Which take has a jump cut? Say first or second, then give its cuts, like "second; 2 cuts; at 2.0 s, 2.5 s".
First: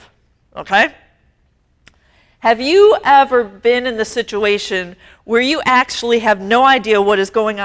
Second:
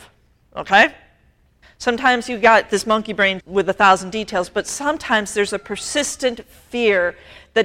second; 2 cuts; at 1.6 s, 3.4 s